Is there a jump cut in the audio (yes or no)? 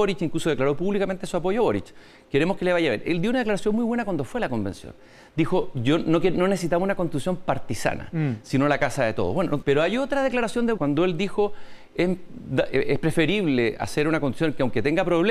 yes